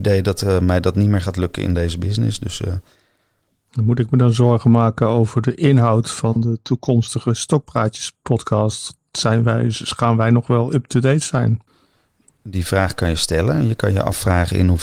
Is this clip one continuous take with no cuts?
yes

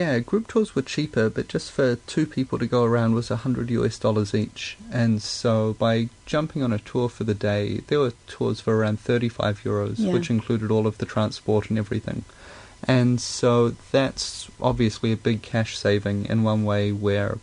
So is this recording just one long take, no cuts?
yes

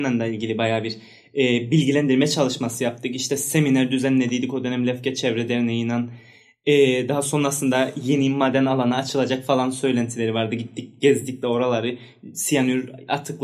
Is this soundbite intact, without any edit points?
yes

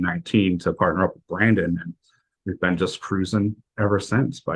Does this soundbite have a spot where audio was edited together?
no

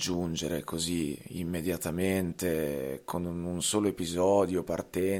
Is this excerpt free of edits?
yes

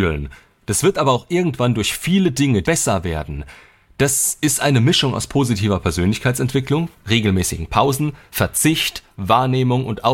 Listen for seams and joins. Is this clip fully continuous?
no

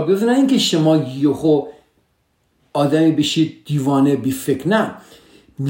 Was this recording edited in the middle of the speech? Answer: no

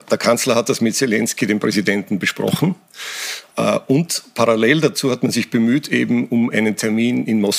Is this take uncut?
yes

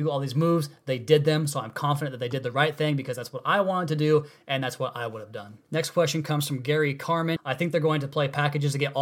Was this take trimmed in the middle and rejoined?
yes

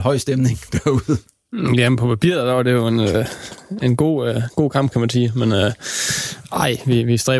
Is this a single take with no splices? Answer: yes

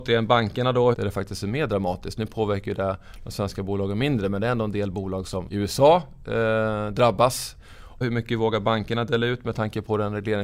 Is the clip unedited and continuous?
no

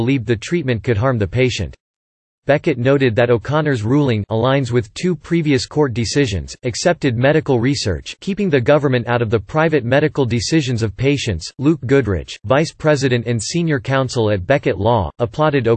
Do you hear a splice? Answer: yes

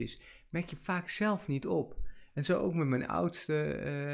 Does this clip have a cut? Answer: yes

